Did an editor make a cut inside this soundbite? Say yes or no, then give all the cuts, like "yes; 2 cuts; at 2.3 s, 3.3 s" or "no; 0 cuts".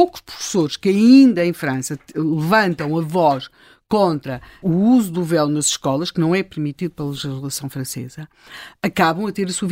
yes; 1 cut; at 4.6 s